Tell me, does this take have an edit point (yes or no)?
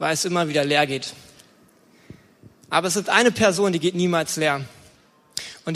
no